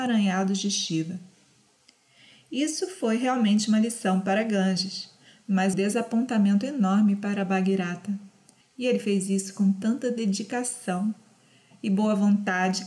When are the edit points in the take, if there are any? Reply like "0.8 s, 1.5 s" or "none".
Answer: 5.7 s, 8.6 s